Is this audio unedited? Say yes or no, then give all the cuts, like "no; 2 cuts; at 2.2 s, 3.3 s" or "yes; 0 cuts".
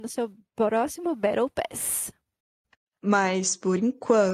yes; 0 cuts